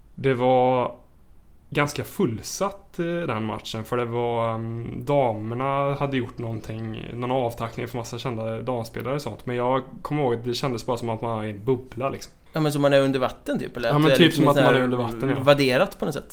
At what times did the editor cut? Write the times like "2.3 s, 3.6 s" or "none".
12.5 s

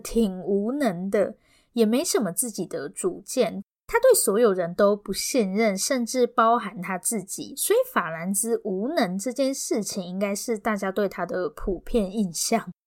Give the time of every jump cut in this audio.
none

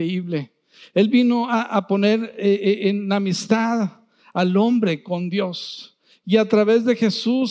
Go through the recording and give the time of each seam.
none

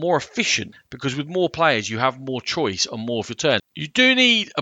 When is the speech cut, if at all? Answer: 3.6 s

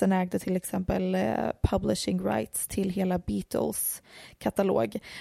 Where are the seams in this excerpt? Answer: none

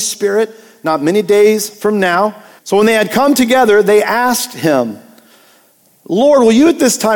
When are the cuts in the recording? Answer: 2.6 s

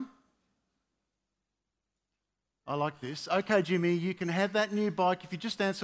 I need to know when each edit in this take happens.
none

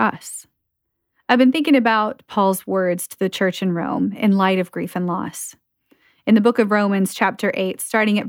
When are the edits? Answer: none

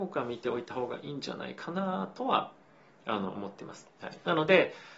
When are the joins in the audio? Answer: 3.9 s

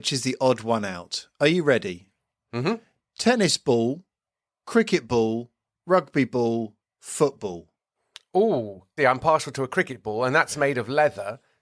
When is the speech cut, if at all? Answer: 9.0 s

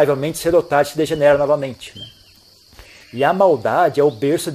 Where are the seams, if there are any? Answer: 3.0 s

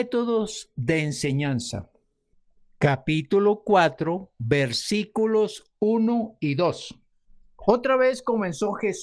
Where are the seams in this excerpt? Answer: none

